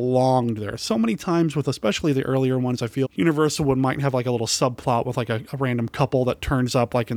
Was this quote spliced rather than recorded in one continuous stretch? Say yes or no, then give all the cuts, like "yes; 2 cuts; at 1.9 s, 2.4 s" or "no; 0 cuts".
yes; 1 cut; at 3.0 s